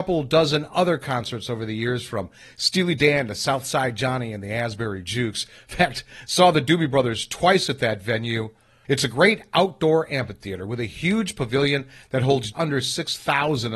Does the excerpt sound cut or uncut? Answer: cut